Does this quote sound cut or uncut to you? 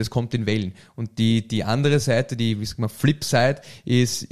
uncut